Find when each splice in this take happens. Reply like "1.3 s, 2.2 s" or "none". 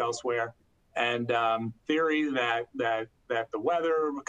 1.8 s